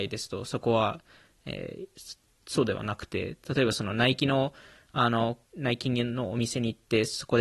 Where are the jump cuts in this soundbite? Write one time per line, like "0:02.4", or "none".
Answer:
0:05.5